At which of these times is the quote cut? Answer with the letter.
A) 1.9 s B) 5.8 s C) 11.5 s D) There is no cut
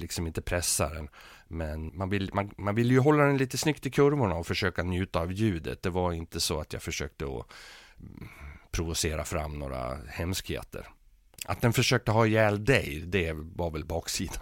A